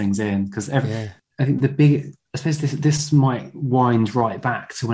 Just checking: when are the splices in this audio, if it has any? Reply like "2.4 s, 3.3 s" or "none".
1.2 s